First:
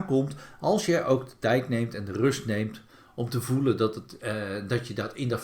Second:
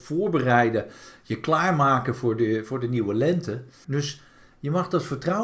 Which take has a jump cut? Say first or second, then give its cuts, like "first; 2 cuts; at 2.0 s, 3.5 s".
second; 1 cut; at 3.8 s